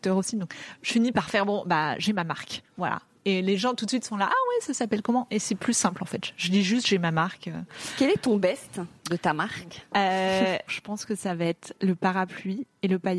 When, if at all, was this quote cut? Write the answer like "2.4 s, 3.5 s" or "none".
2.7 s, 10.7 s